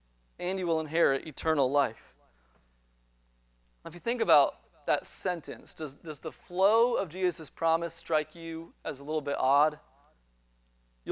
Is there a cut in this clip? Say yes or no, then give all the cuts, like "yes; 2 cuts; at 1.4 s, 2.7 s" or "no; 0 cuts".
no; 0 cuts